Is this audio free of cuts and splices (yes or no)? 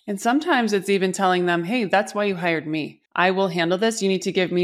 no